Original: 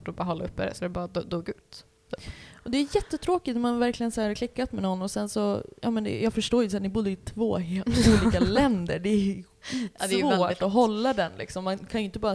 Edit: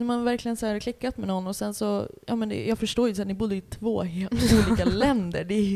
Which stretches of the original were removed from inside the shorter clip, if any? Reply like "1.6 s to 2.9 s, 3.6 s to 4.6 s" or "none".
none